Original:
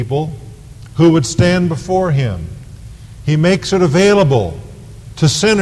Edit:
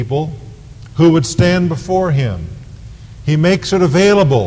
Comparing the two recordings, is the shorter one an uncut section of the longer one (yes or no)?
yes